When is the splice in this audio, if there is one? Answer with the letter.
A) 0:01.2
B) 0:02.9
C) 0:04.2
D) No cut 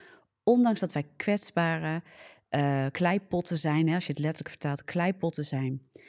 D